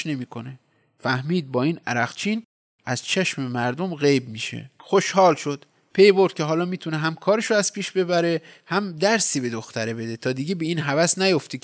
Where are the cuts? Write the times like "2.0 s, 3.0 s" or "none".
4.8 s